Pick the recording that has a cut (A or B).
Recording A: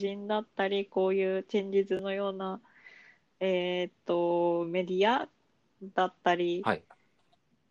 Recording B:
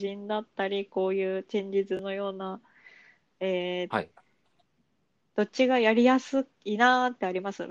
B